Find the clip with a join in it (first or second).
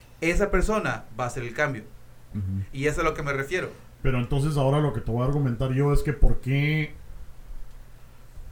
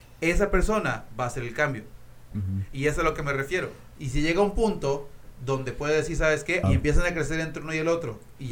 second